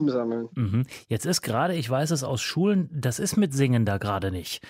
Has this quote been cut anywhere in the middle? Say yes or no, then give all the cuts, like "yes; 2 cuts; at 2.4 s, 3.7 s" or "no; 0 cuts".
no; 0 cuts